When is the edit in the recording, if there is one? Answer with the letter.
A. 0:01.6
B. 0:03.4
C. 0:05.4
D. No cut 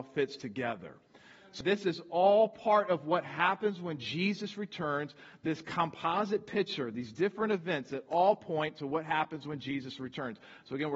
A